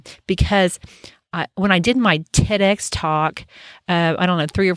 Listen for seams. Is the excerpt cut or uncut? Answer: uncut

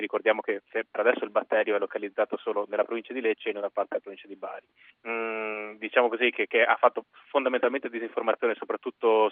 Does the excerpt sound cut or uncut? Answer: cut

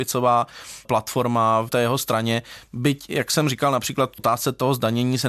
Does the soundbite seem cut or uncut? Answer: uncut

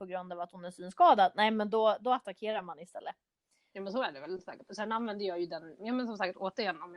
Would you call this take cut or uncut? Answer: cut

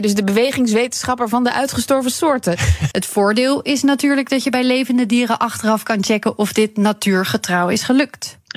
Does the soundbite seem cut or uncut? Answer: cut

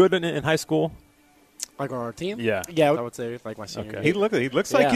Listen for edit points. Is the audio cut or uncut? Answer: cut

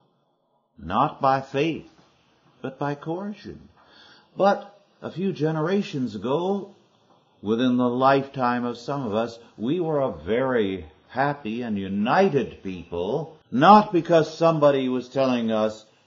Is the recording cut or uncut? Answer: cut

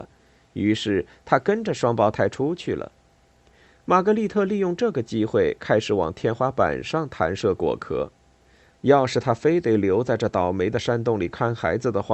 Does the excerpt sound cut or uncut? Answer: cut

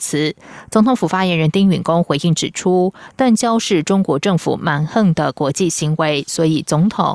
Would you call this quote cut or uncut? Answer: uncut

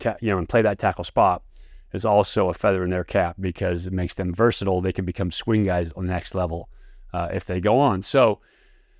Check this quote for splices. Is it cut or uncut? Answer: uncut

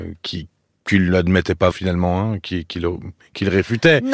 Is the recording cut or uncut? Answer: cut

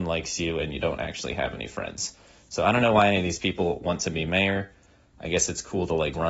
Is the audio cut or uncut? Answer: uncut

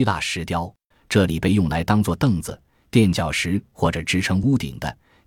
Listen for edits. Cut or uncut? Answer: cut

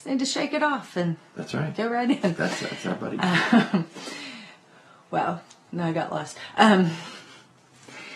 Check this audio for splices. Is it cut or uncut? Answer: uncut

